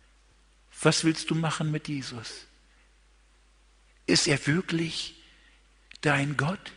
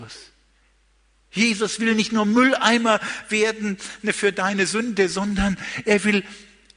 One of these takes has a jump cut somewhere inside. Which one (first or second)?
second